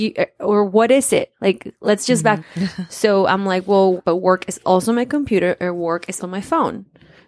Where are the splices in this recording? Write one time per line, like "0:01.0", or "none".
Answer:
0:02.4
0:04.0
0:06.2